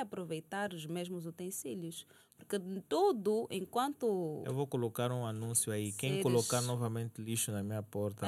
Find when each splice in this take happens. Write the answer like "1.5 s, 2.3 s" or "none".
none